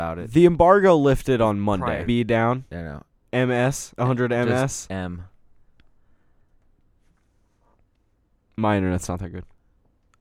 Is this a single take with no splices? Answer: no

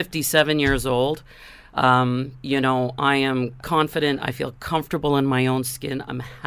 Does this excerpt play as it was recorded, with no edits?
yes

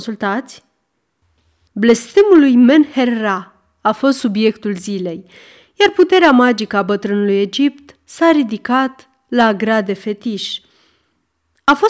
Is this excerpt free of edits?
no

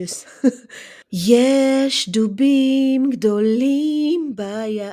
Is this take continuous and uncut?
no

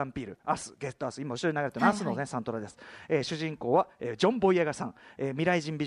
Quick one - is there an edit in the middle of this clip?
no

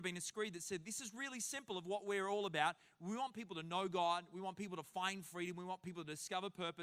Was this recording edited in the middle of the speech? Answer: no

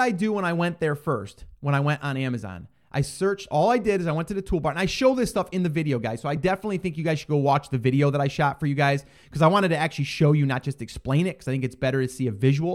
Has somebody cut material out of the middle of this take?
no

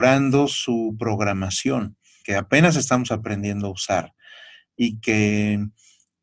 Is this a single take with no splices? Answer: no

